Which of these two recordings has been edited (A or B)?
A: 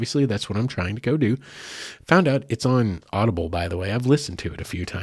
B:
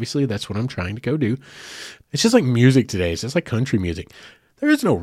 B